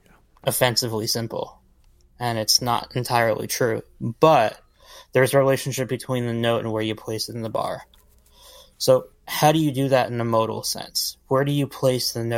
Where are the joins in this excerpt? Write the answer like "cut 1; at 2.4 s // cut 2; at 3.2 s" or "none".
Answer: none